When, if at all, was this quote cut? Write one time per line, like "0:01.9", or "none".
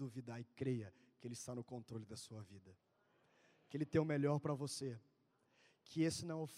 none